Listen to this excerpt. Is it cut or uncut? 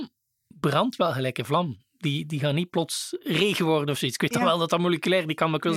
uncut